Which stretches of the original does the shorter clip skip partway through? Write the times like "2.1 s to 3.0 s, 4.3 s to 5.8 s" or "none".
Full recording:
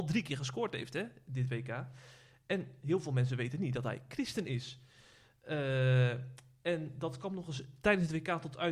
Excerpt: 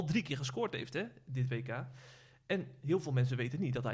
none